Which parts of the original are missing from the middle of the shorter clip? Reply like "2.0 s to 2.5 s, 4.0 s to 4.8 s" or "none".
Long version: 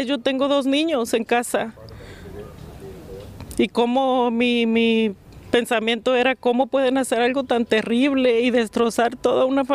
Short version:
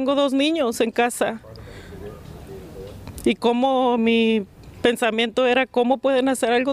4.3 s to 4.7 s